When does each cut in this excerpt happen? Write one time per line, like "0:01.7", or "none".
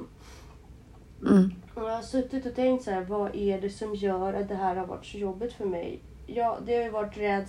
0:01.7